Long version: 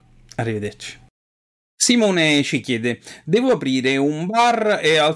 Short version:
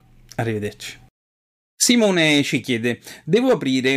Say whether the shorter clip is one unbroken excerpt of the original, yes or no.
yes